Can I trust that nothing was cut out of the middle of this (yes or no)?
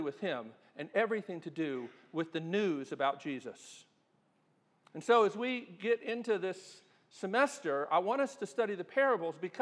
yes